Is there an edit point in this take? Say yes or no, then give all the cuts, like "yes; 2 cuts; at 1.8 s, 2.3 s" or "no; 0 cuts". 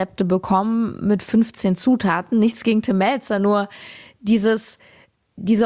no; 0 cuts